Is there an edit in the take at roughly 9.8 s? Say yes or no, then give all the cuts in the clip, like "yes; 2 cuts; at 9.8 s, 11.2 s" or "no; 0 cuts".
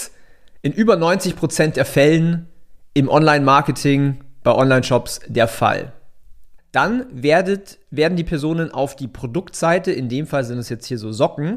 no; 1 cut; at 6.6 s